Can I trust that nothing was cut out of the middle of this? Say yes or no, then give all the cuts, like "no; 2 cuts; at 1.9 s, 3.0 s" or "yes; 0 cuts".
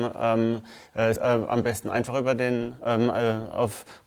no; 1 cut; at 1.1 s